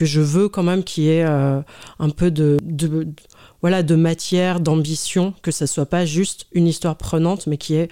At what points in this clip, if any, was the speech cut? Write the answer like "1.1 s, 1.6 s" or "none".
none